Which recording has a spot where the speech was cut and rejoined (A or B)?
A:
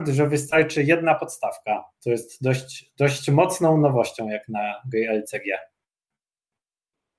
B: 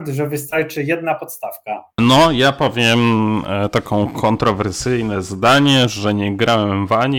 B